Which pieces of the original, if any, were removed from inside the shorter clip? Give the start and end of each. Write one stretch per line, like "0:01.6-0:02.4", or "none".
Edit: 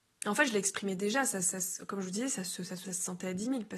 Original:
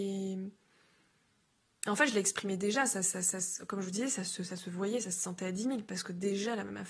0:03.0-0:03.2
0:04.6-0:05.0